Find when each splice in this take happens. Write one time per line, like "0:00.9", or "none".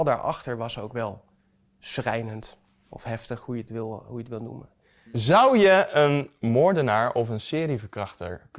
none